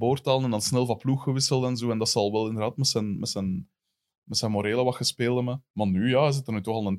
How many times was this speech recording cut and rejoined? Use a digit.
1